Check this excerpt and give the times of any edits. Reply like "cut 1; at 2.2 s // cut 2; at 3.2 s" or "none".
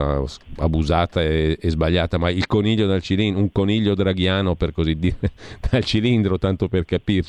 none